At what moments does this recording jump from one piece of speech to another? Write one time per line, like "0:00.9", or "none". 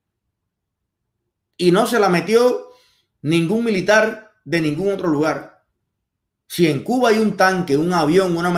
0:06.4